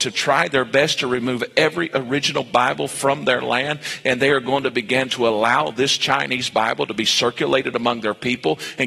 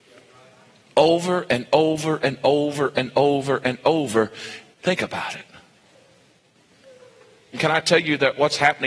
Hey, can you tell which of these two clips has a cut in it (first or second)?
second